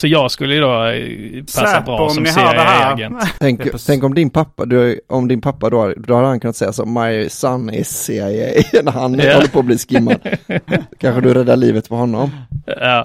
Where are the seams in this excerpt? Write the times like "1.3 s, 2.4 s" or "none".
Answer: 3.4 s